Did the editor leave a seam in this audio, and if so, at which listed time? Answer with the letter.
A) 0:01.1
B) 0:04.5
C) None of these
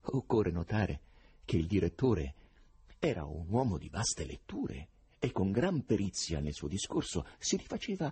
C